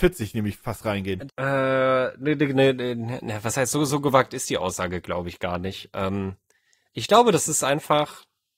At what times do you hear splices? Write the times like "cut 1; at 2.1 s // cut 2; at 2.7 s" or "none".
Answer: cut 1; at 1.3 s